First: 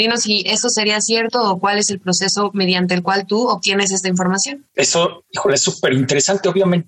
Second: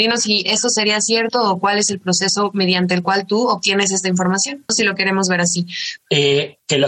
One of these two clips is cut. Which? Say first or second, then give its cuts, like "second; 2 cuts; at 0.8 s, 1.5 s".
second; 2 cuts; at 4.7 s, 6.0 s